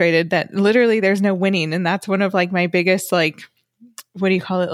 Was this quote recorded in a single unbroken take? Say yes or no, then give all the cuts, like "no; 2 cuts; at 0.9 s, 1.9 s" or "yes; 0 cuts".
yes; 0 cuts